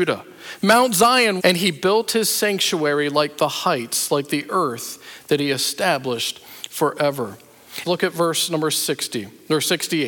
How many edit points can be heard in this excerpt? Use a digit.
2